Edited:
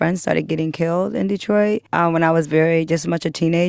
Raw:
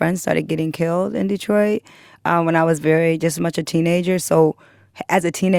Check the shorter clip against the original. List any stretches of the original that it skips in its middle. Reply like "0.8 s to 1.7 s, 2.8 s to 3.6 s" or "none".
1.9 s to 2.2 s